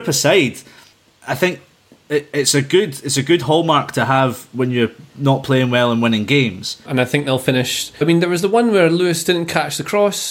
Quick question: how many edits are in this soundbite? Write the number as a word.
two